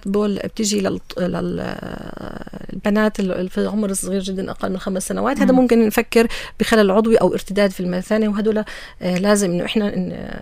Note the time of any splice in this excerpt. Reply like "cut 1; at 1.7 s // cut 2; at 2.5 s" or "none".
none